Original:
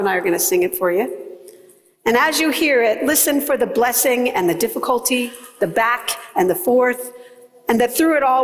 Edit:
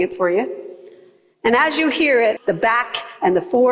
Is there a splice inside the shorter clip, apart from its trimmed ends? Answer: yes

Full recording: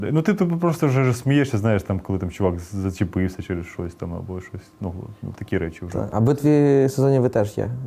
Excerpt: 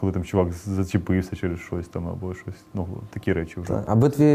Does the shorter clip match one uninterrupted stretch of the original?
no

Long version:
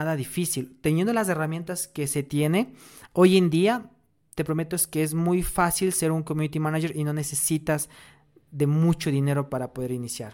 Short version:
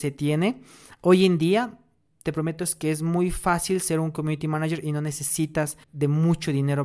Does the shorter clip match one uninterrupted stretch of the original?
no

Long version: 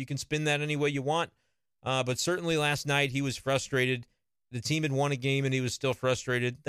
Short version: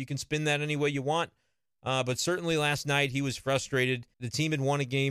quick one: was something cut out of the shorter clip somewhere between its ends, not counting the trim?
yes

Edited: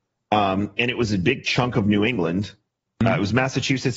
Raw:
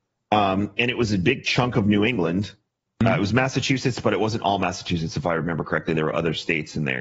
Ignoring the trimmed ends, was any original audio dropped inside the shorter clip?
no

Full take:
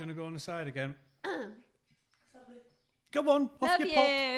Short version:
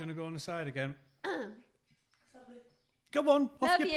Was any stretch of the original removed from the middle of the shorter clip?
no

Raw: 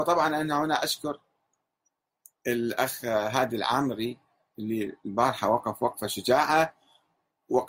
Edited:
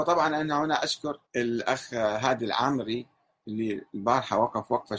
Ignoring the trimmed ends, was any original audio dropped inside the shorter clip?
yes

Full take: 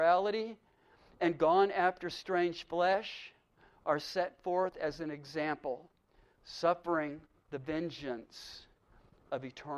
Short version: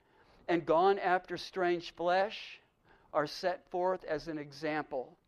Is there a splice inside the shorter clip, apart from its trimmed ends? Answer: no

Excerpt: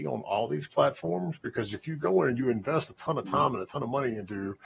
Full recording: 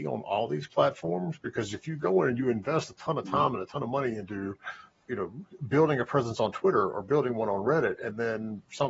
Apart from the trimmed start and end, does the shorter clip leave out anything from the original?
no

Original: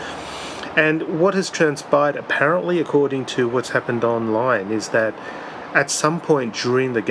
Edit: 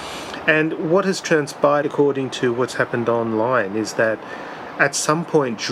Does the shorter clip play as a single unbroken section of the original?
no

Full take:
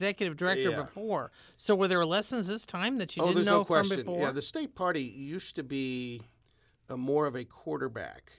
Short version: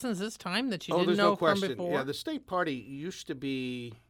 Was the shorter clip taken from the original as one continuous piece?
yes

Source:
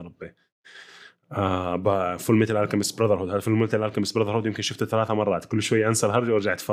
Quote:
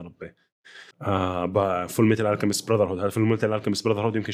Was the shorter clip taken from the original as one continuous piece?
no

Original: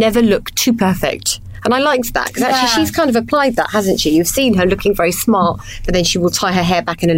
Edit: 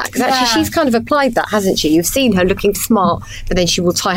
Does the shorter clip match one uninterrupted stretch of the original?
no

